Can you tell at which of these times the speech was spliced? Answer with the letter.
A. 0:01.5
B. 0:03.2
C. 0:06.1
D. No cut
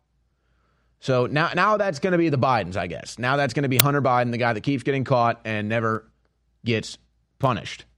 D